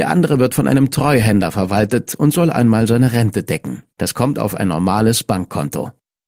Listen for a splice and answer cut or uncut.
cut